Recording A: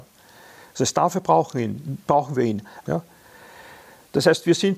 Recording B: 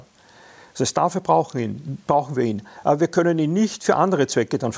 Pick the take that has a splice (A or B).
A